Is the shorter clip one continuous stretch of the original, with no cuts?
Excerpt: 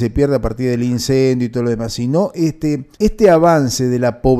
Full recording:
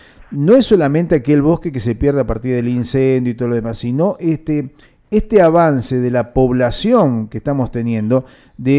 no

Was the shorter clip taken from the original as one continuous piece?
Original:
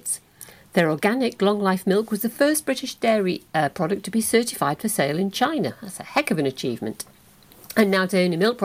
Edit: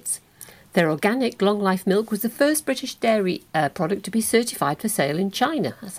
yes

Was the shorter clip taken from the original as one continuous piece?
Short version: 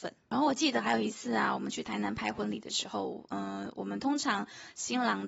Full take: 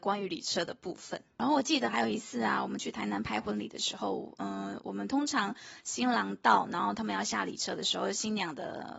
yes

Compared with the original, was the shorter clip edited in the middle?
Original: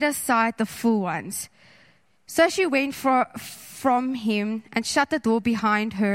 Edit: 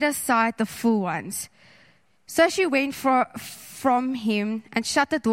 no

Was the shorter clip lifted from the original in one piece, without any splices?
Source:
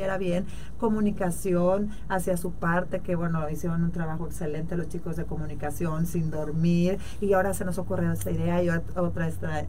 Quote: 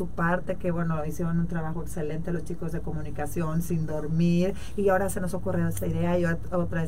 yes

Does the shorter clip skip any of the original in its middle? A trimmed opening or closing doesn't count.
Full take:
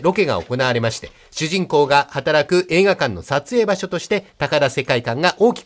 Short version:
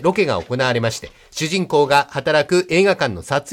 no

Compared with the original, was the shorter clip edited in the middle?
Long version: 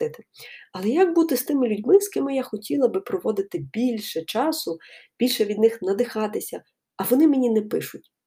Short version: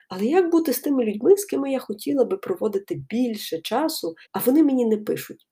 yes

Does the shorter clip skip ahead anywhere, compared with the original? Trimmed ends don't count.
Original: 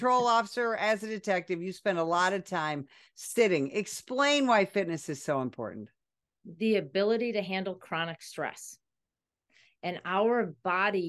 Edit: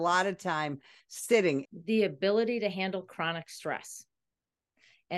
yes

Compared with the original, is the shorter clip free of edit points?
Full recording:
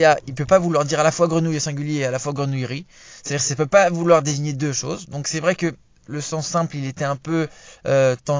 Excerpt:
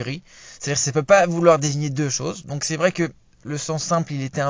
yes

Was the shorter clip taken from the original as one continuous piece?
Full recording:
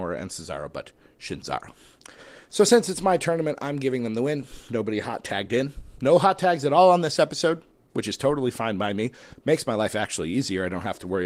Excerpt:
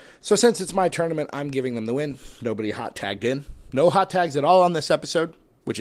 yes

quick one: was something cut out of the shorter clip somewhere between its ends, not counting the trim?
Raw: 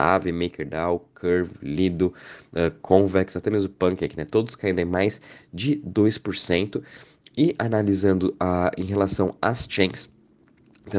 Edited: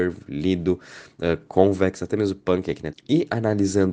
yes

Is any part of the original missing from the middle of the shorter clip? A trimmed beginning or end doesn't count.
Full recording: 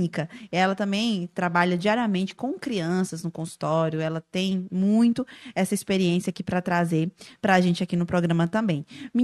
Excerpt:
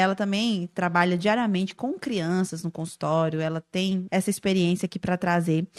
yes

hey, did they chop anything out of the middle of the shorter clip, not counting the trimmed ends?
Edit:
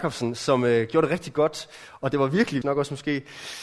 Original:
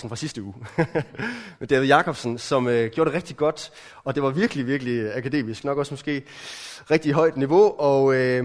yes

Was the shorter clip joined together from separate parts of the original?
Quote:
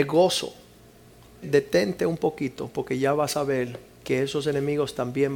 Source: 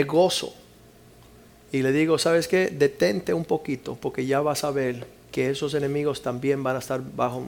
yes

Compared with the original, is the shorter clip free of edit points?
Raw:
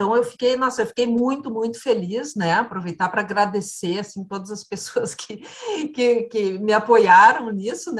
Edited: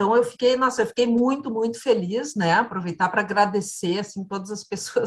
yes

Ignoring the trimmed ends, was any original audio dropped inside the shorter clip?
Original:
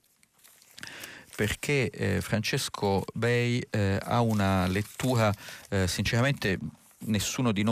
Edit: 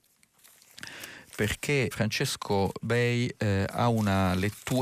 yes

